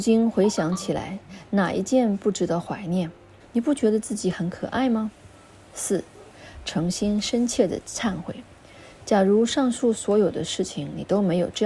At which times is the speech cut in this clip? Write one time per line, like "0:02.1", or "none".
0:03.4